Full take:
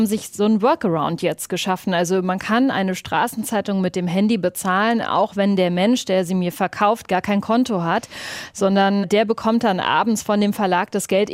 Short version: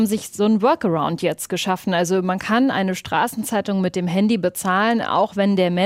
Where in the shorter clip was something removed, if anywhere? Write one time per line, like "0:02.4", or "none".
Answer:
none